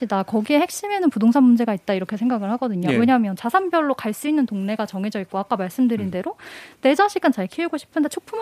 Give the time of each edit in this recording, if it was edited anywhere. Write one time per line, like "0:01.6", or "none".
none